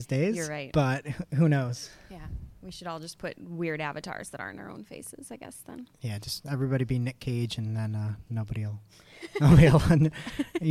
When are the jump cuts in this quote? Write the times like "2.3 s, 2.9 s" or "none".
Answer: none